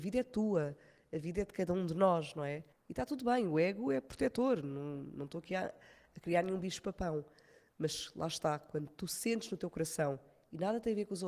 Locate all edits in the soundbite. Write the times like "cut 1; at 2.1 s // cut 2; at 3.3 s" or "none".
cut 1; at 2.7 s